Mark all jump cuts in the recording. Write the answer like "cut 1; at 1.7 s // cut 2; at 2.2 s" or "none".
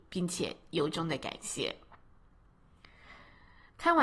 none